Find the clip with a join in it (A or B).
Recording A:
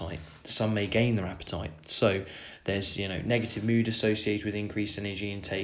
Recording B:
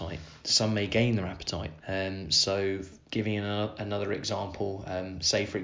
B